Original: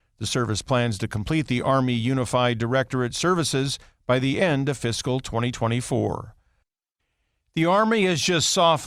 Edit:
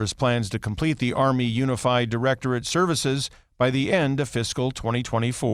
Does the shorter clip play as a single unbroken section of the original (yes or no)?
yes